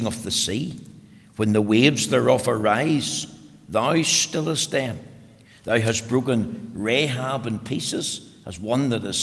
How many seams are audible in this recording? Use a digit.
0